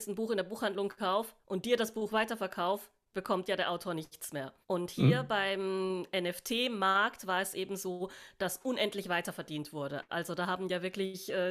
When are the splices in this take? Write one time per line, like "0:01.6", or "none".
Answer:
0:04.6